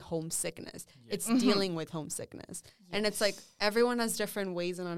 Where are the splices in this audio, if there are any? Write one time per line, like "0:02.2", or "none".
none